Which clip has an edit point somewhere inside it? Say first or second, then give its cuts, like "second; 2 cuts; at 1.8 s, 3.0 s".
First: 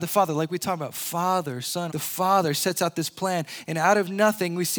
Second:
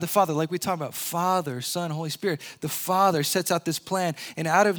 first; 1 cut; at 1.9 s